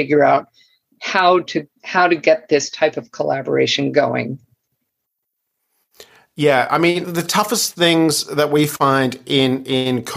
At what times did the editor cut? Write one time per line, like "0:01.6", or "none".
0:01.8
0:07.0